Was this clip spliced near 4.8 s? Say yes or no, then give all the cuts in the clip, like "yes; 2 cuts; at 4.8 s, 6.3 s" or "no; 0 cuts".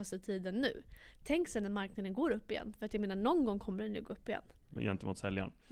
yes; 1 cut; at 4.8 s